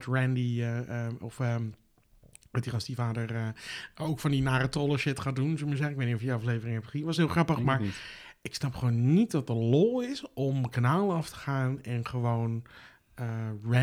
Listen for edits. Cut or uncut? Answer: uncut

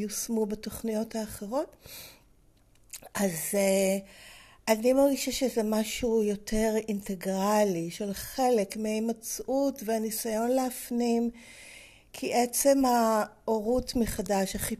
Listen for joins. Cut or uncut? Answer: uncut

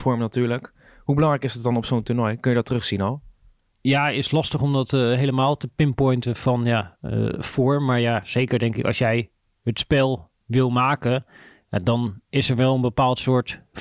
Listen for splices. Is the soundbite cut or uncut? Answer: uncut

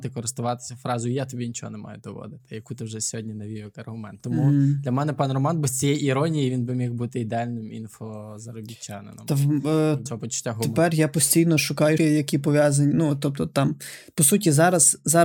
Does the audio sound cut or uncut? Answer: cut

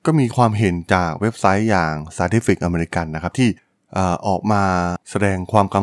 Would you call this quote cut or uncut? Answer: uncut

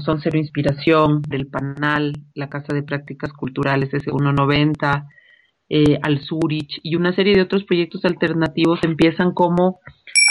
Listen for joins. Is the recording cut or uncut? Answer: cut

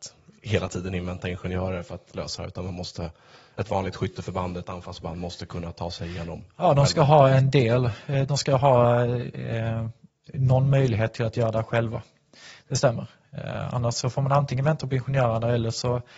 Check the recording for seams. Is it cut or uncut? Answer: uncut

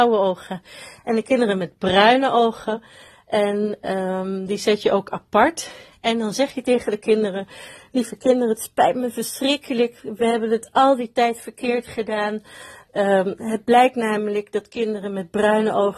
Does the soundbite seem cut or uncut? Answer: uncut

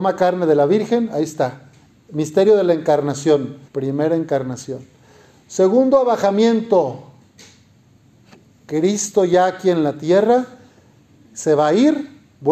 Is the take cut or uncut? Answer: cut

